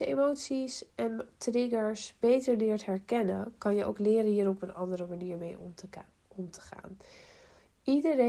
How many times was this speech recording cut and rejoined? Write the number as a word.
zero